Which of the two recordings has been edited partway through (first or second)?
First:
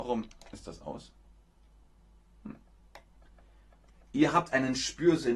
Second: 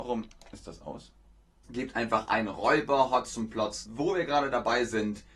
second